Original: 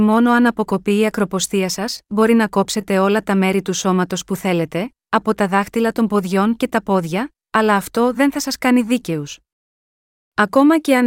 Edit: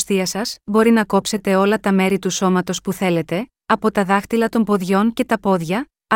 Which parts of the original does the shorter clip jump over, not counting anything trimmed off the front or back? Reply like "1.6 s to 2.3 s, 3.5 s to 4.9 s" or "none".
none